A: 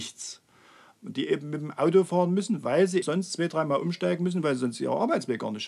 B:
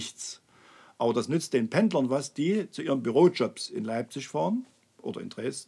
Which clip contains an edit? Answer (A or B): A